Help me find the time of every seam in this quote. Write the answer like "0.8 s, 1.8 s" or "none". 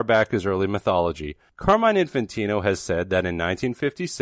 1.5 s

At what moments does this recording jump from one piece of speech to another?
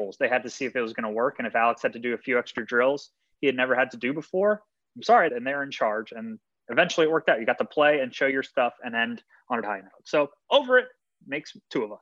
5.3 s, 9.6 s

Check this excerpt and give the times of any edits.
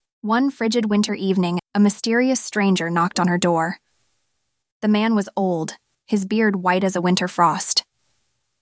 1.6 s

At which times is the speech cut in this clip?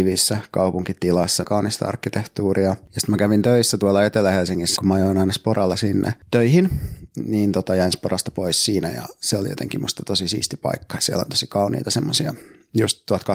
1.4 s, 4.8 s

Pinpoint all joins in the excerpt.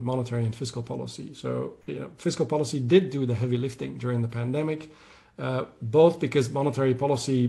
none

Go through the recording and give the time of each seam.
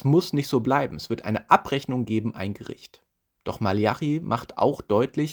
none

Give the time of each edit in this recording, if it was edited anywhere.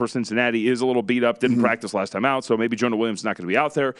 none

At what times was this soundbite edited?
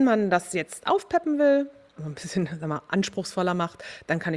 2.0 s

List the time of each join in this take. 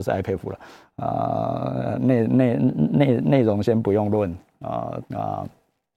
2.0 s, 5.0 s

